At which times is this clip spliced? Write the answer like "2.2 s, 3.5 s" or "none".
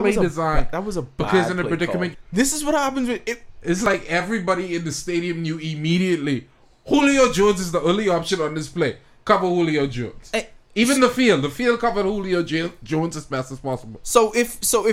2.1 s

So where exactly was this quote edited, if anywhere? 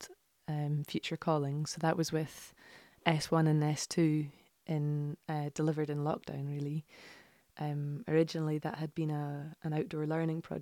none

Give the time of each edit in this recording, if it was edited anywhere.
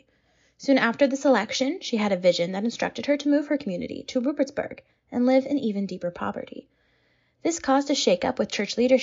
none

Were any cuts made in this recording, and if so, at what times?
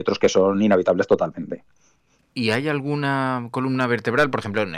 none

